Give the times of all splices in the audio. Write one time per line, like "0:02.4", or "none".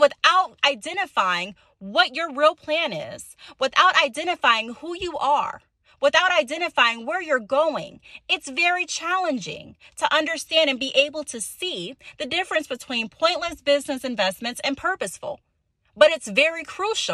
none

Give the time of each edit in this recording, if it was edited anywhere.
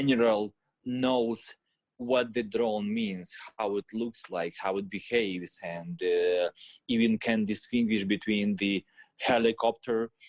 none

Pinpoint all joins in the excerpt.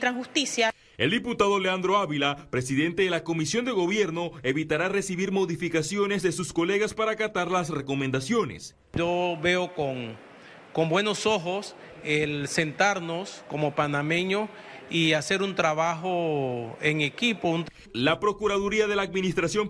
0:08.8

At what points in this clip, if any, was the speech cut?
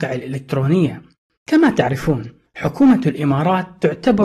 0:01.4

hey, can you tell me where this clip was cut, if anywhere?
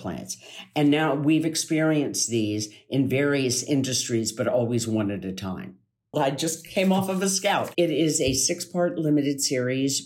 0:06.1

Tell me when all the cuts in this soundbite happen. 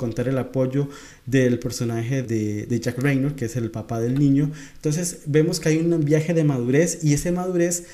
0:02.2

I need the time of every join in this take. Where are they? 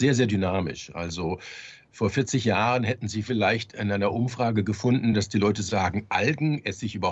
none

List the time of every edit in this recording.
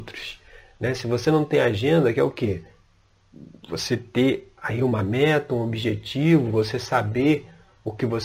none

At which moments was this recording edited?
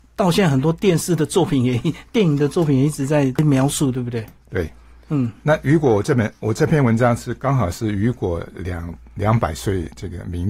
none

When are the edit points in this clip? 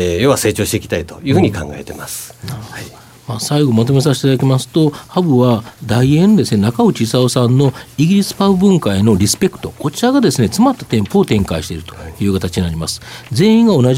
none

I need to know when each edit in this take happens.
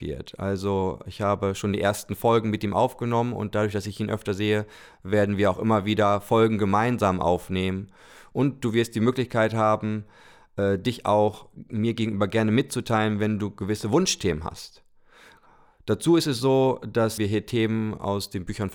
0:17.2

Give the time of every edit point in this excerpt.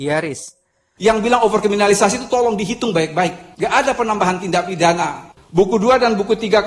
0:01.0
0:05.3

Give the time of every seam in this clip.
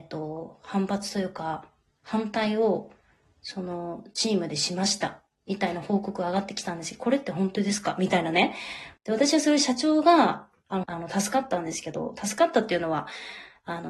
0:09.0
0:10.8

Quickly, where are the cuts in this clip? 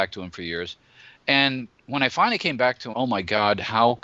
0:02.9

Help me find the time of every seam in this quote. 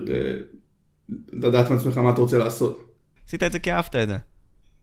0:03.2

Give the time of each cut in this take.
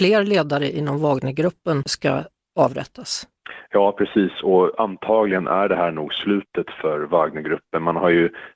none

